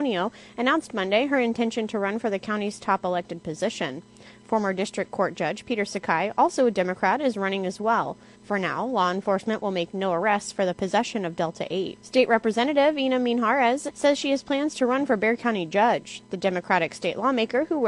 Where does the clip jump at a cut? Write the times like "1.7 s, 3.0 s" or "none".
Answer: 8.3 s